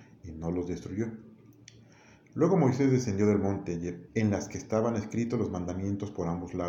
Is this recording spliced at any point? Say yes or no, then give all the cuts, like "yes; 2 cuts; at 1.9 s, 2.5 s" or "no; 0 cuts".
yes; 1 cut; at 4.1 s